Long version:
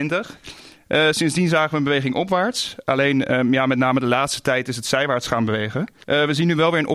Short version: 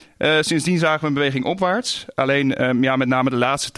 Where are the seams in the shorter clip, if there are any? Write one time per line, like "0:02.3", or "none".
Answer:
none